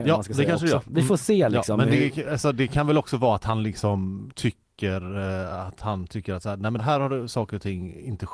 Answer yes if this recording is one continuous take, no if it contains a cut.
no